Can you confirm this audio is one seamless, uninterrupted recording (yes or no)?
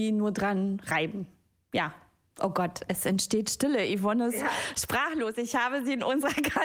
yes